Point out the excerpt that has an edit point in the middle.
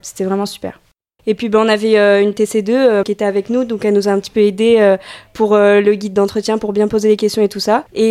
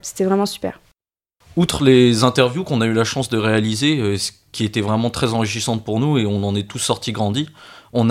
first; 2 cuts; at 1.2 s, 3.0 s

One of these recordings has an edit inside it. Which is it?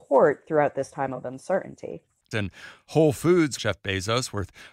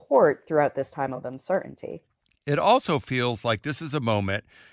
first; 2 cuts; at 2.3 s, 3.6 s

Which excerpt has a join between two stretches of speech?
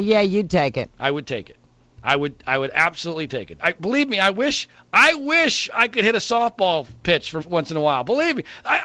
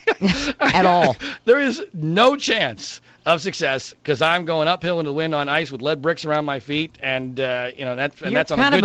first; 2 cuts; at 3.6 s, 7.4 s

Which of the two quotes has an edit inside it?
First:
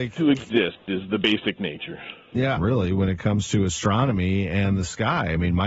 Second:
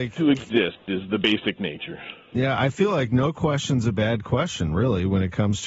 first; 1 cut; at 2.6 s

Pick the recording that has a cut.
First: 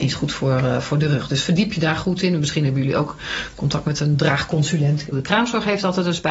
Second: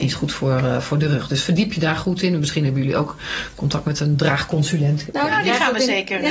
first; 1 cut; at 5.1 s

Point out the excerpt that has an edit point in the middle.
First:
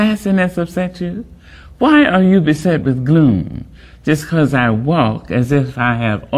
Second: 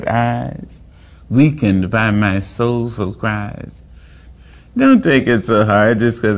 second; 2 cuts; at 1.1 s, 4.3 s

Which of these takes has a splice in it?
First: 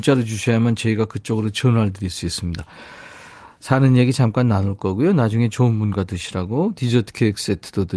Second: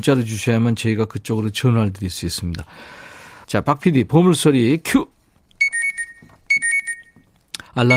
second; 1 cut; at 3.4 s

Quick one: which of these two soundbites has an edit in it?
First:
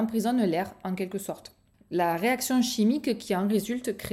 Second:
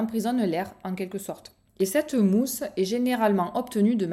second; 1 cut; at 1.7 s

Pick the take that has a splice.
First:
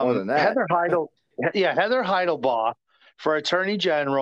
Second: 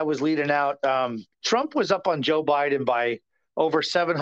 second; 1 cut; at 1.3 s

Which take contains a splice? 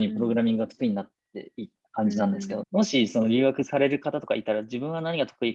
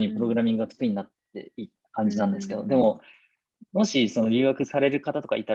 first; 1 cut; at 2.6 s

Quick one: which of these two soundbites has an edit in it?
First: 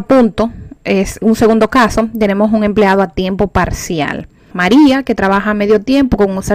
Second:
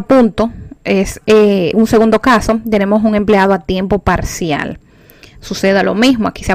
first; 2 cuts; at 1.2 s, 4.5 s

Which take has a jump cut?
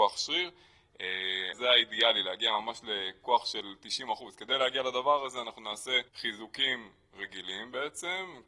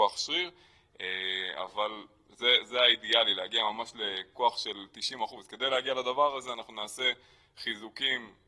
first; 2 cuts; at 1.5 s, 6.1 s

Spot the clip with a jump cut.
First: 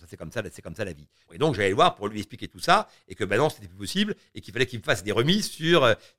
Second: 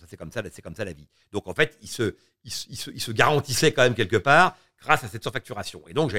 first; 1 cut; at 1.3 s

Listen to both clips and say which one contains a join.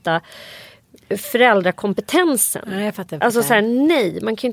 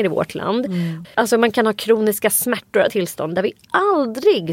second; 2 cuts; at 1.0 s, 2.9 s

